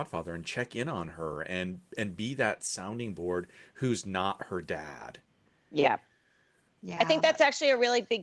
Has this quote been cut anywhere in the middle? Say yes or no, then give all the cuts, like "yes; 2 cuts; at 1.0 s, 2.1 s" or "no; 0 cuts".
no; 0 cuts